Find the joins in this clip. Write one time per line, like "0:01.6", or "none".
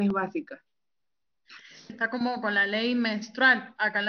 0:01.9

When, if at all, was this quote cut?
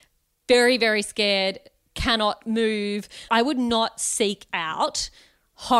0:03.3

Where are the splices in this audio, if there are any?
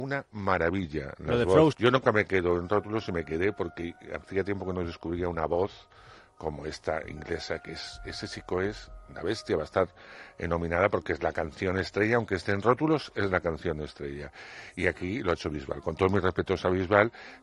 0:01.7

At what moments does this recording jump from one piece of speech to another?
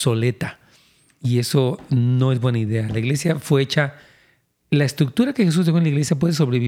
none

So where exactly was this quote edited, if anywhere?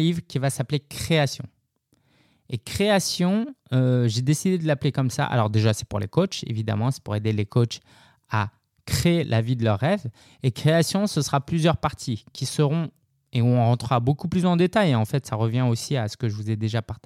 none

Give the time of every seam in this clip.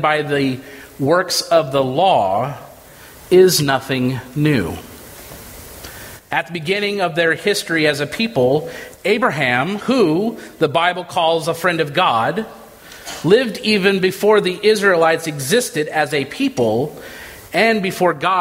none

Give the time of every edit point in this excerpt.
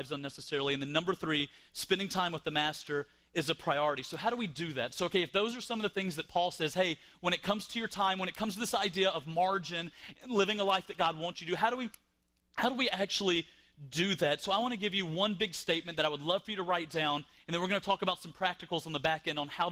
none

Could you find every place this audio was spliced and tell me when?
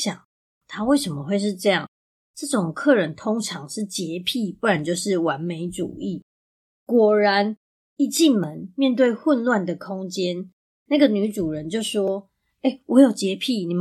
none

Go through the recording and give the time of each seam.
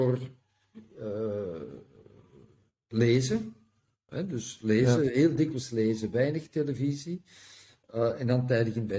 0:07.8

